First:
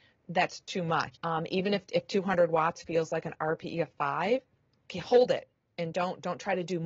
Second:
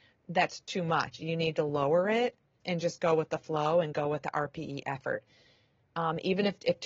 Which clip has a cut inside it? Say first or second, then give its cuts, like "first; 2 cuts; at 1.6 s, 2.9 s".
first; 1 cut; at 1.1 s